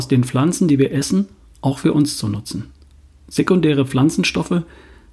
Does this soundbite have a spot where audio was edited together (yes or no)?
no